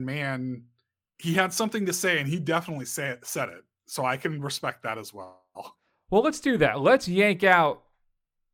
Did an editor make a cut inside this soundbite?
no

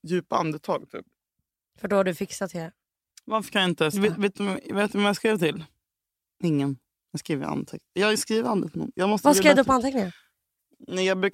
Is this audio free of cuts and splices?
no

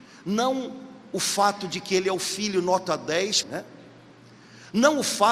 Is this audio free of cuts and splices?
no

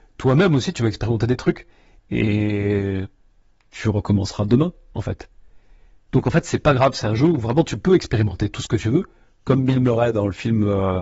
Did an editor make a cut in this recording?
yes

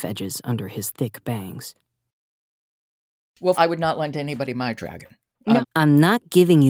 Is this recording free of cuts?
no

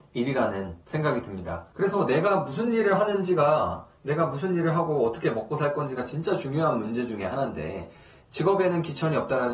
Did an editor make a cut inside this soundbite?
yes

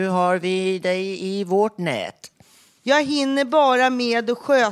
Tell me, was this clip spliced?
yes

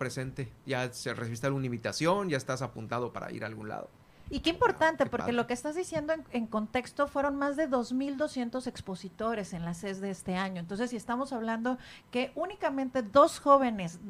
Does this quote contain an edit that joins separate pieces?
yes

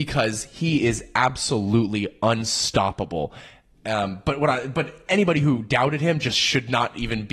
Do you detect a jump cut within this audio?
no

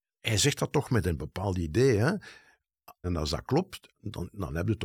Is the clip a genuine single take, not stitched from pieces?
no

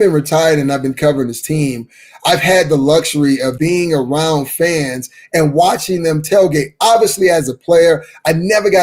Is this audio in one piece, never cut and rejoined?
no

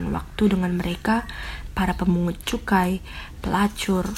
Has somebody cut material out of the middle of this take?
no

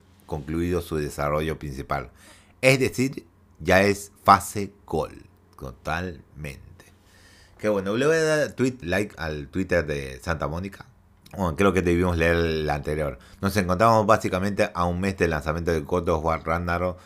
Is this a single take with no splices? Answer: no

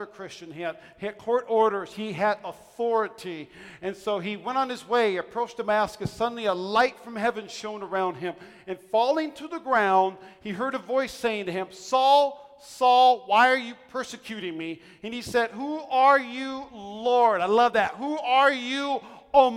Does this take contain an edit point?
no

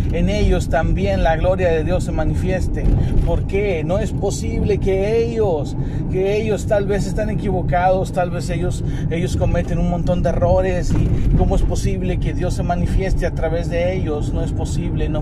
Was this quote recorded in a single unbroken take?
yes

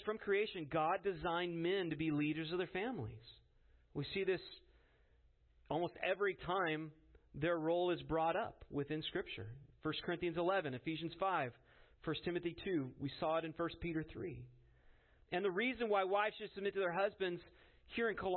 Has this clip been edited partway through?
no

